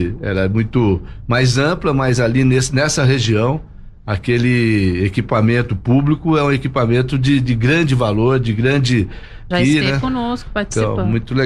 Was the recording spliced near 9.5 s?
yes; 1 cut; at 9.5 s

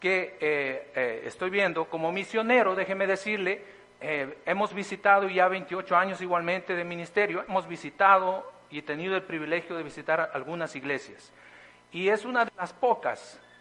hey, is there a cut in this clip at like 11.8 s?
no; 0 cuts

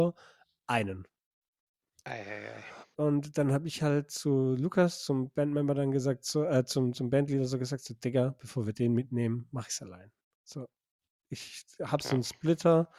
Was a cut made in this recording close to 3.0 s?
yes; 1 cut; at 3.0 s

